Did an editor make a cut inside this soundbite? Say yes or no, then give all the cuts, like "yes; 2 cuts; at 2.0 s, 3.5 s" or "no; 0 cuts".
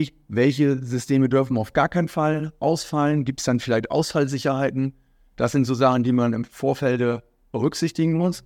no; 0 cuts